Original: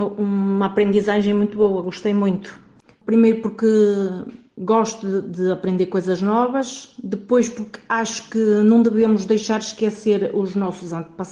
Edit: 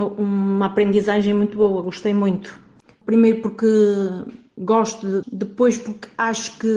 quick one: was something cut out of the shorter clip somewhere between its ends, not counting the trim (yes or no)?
yes